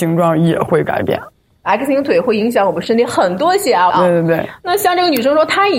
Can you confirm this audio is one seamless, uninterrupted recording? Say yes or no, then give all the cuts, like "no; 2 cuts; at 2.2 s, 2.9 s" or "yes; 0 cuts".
no; 2 cuts; at 1.6 s, 3.9 s